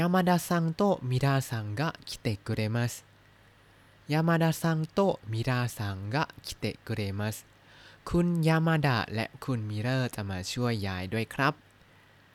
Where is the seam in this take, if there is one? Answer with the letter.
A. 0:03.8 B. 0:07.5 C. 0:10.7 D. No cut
D